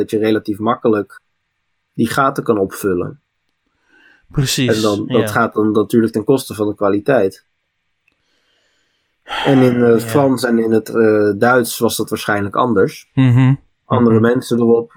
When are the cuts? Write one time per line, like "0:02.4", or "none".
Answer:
none